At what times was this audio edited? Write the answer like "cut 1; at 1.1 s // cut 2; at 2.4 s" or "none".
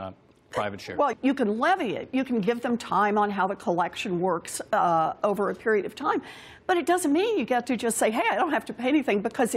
cut 1; at 1.1 s